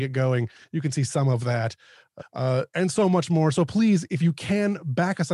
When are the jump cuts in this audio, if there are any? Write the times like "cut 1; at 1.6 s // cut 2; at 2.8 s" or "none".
cut 1; at 2.2 s